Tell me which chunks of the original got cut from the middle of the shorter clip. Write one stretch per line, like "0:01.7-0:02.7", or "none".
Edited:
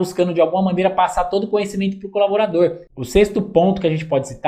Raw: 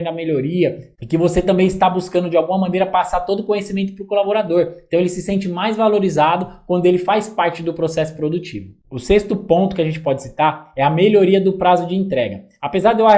0:04.8-0:08.8